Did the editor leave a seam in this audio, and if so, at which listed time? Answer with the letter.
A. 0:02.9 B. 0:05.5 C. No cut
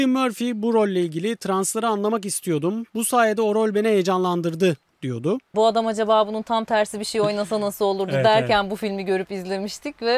B